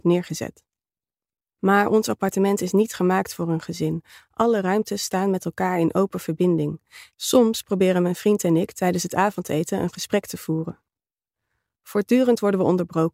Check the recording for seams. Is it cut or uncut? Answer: cut